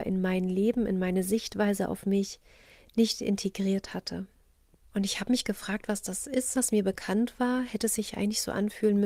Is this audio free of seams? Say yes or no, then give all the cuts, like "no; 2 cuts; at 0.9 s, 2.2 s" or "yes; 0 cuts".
no; 2 cuts; at 4.8 s, 6.6 s